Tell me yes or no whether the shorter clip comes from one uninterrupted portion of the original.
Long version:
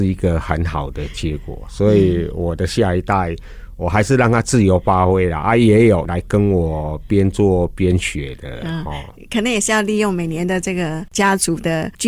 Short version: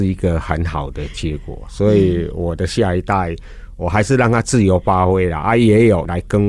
yes